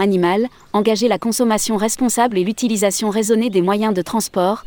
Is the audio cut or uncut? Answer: uncut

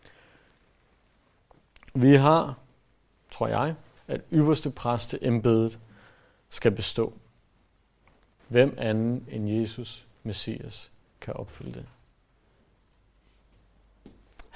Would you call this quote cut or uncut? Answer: cut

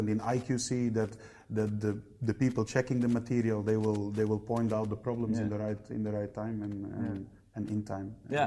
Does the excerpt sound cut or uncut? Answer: uncut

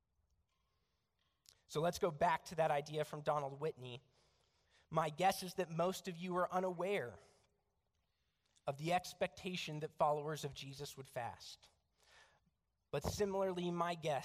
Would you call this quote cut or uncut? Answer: uncut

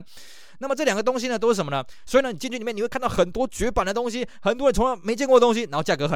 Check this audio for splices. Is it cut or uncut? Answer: cut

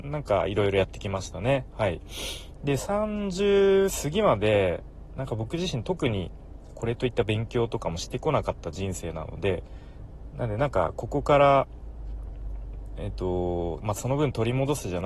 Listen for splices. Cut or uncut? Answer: cut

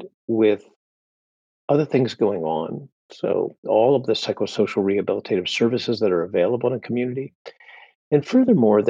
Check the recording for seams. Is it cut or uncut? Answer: uncut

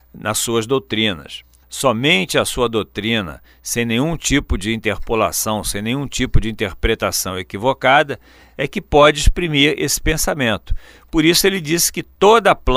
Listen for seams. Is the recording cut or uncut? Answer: cut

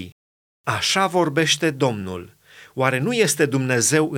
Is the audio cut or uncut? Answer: uncut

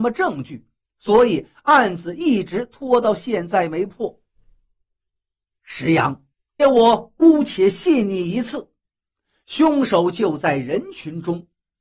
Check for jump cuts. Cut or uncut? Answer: cut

